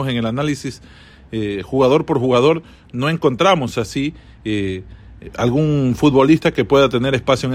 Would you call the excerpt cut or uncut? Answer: uncut